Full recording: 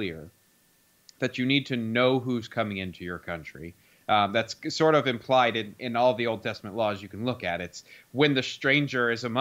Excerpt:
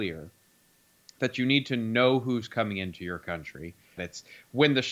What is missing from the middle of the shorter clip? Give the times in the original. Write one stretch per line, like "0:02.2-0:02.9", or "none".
0:04.0-0:07.6